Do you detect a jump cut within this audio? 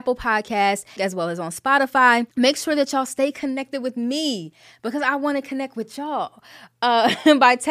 yes; 2 cuts; at 1.0 s, 2.3 s

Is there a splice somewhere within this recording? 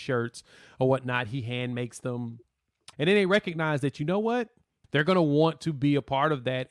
yes; 2 cuts; at 2.9 s, 4.8 s

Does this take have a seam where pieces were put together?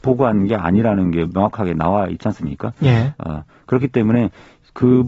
no; 0 cuts

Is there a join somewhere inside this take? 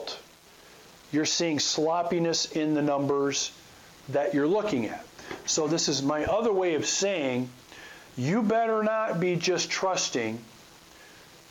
no; 0 cuts

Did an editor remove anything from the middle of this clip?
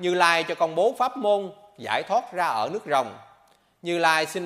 no; 0 cuts

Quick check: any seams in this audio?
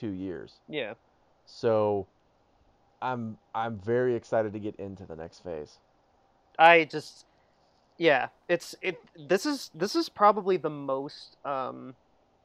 no; 0 cuts

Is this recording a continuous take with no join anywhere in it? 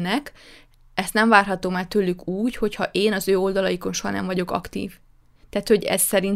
yes; 0 cuts

